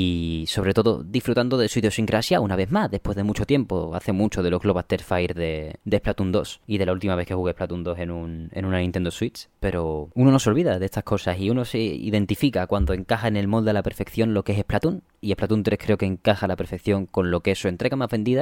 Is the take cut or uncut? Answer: uncut